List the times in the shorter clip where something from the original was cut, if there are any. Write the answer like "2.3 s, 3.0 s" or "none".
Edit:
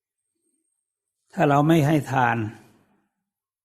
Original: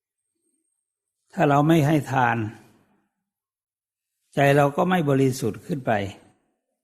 none